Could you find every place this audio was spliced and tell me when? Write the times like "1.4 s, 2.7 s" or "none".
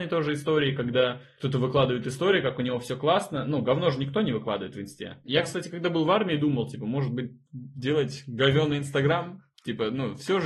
5.3 s